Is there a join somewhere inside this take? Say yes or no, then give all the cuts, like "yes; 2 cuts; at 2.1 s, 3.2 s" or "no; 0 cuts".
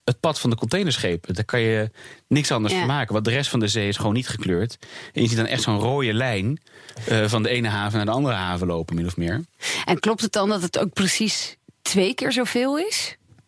no; 0 cuts